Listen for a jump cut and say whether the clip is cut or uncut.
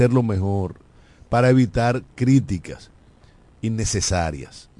uncut